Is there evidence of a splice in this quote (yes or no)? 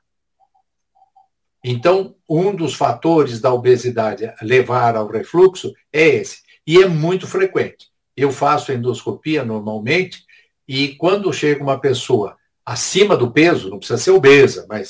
no